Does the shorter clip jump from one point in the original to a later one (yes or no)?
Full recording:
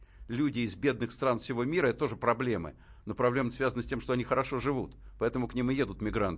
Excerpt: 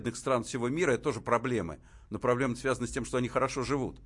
no